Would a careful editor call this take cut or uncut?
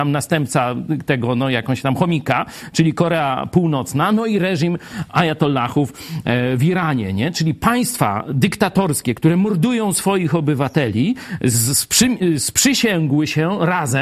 uncut